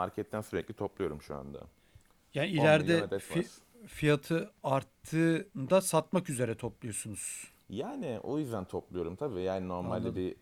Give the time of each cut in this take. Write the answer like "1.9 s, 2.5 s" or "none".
none